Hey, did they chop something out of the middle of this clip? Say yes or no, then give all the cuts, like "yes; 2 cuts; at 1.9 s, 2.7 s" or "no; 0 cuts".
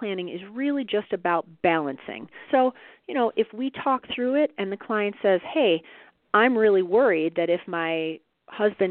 yes; 1 cut; at 2.5 s